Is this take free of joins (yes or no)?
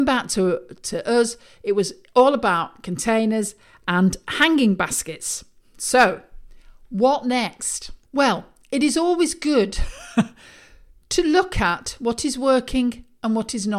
no